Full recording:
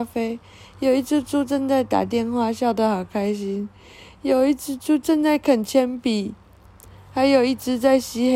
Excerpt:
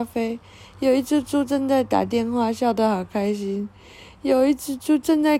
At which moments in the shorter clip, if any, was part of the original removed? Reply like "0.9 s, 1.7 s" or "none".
none

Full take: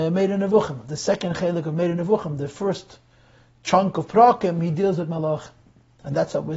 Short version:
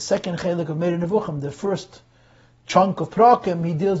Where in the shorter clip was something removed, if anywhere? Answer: none

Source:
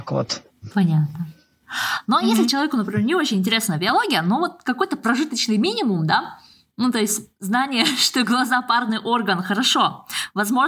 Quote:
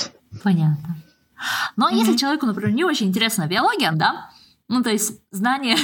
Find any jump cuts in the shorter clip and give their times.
3.9 s

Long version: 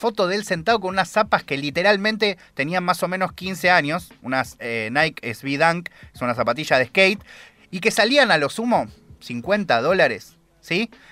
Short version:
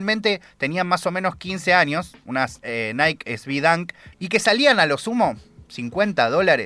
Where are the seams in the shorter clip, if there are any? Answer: 4.1 s

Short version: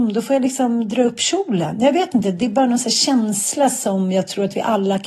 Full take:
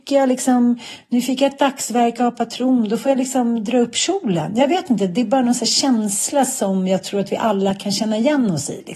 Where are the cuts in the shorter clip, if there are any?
none

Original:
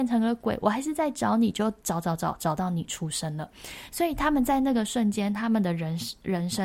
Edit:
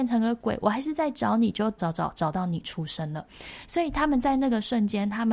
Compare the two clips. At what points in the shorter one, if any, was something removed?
1.8 s

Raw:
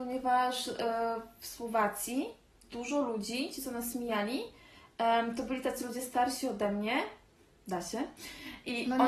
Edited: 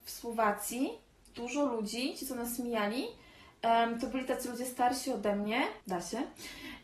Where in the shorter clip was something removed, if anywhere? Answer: 5.8 s

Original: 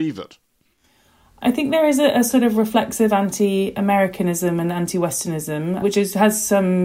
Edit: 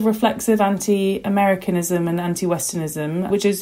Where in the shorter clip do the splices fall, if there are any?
none

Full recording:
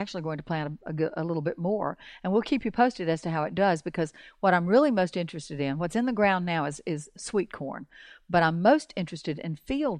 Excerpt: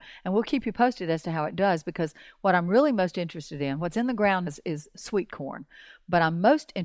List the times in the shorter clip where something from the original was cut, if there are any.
4.5 s

